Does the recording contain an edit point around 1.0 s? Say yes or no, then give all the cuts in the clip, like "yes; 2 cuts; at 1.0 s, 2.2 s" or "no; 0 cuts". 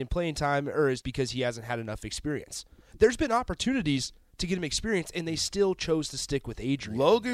yes; 1 cut; at 1.0 s